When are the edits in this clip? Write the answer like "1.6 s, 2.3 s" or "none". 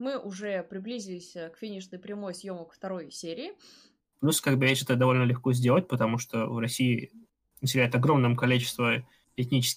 4.0 s